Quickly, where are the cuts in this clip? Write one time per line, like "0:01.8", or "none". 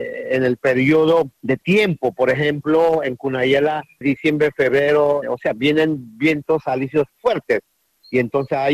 0:01.3
0:04.0
0:05.2